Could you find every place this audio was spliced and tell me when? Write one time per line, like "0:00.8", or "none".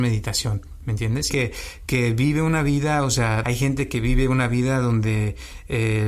0:01.3
0:03.4

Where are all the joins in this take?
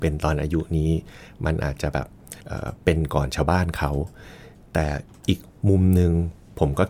0:02.4

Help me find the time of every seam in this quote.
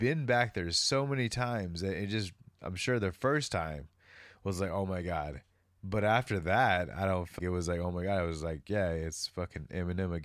0:07.4

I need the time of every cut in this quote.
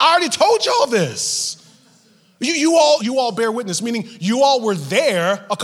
0:03.0

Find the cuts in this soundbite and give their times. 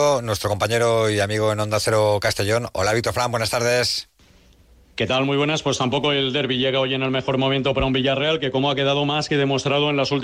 none

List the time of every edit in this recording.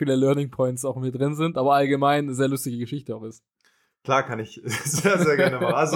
none

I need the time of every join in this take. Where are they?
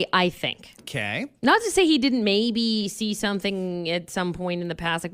none

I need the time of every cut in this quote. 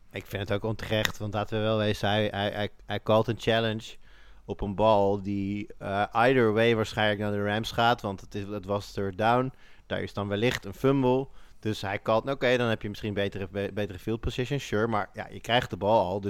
none

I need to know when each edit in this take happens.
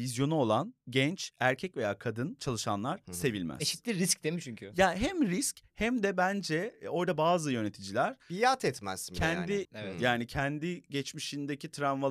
0:09.6

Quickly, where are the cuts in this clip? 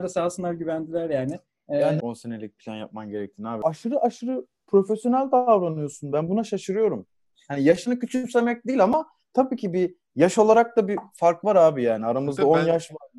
0:02.0

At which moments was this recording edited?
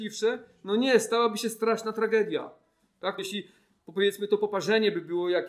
0:03.2

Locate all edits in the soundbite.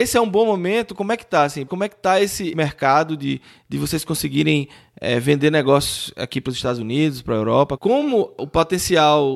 0:01.7
0:07.8

